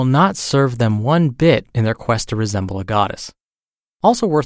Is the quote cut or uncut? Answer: uncut